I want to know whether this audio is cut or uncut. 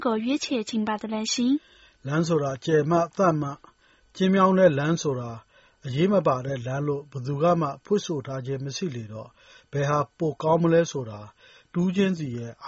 uncut